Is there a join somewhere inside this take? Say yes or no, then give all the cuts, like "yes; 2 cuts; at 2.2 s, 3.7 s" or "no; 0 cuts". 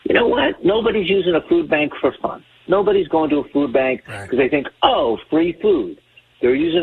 no; 0 cuts